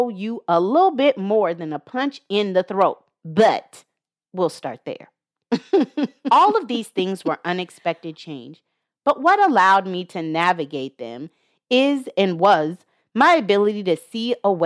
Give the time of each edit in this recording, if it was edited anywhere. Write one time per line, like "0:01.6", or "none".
none